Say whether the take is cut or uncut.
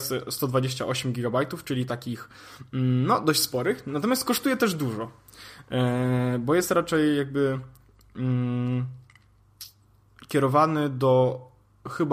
uncut